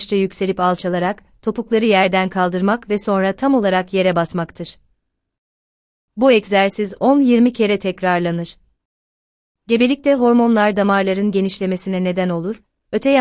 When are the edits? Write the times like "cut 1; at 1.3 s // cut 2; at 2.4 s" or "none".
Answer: none